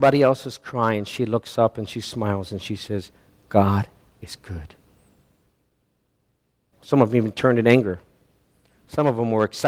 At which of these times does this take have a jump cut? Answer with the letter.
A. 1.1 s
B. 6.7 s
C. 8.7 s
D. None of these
B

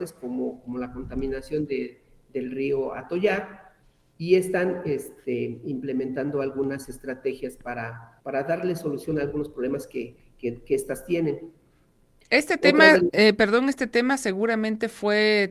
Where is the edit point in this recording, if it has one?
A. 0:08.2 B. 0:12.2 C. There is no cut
A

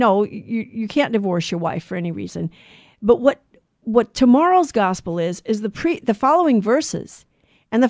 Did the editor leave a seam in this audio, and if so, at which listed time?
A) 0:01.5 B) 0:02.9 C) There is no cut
C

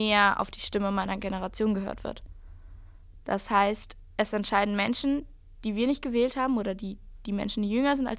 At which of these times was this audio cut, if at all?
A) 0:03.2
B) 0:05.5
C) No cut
A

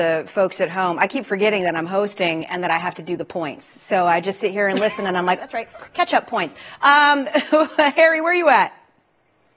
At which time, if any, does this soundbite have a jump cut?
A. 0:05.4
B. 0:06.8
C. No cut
A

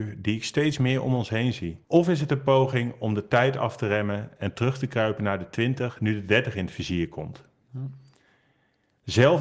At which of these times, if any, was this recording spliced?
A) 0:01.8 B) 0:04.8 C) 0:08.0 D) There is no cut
A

